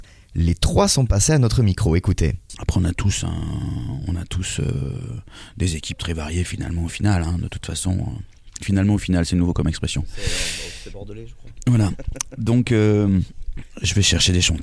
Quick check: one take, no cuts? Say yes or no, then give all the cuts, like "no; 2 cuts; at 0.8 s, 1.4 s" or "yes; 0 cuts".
no; 1 cut; at 2.5 s